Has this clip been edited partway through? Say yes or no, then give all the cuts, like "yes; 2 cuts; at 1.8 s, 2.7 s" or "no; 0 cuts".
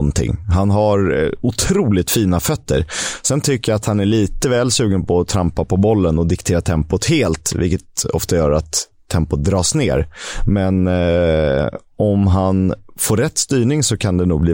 no; 0 cuts